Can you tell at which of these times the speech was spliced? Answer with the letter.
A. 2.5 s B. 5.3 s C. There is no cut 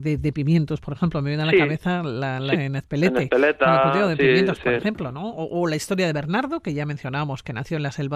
A